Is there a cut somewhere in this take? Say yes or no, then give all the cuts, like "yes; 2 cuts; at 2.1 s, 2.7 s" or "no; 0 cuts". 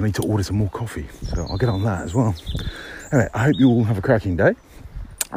no; 0 cuts